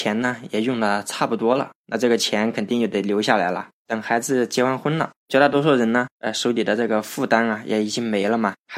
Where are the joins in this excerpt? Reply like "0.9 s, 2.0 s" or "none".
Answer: 1.8 s